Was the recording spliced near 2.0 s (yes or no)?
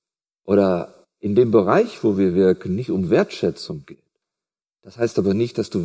no